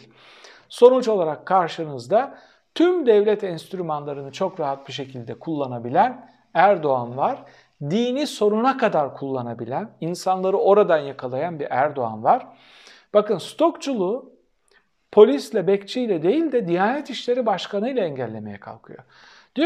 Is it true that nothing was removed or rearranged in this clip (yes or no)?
yes